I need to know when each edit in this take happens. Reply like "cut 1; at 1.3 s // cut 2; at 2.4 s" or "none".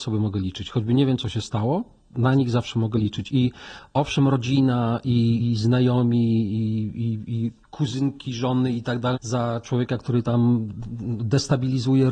cut 1; at 5.4 s // cut 2; at 7.6 s // cut 3; at 9.1 s